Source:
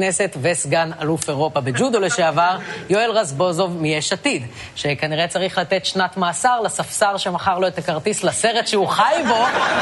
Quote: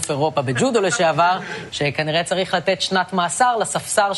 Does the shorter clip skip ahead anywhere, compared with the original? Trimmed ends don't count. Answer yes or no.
yes